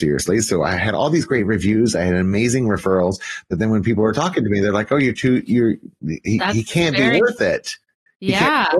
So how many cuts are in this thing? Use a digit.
0